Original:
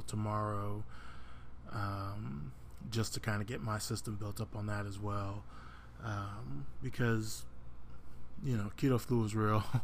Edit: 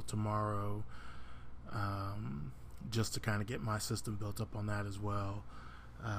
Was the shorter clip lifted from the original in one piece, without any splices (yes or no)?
yes